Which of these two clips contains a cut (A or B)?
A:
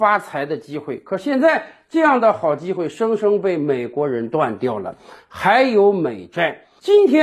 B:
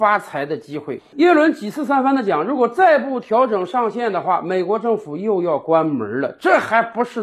B